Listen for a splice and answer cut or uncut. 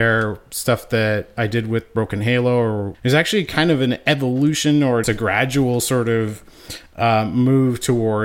cut